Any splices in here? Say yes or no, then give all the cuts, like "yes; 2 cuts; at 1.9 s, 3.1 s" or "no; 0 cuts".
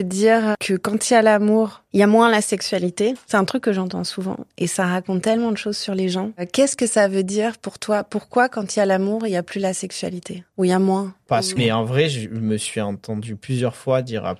yes; 1 cut; at 11.6 s